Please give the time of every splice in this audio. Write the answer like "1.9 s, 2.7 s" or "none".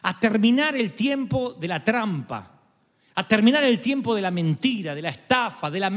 none